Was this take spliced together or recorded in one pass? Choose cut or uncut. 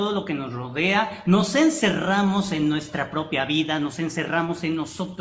uncut